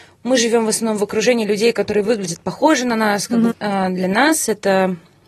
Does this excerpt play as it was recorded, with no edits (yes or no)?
no